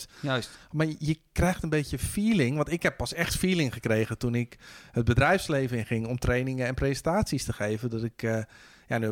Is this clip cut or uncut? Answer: uncut